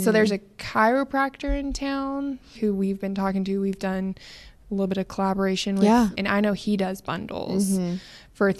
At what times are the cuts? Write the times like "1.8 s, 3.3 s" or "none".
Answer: 2.5 s, 6.1 s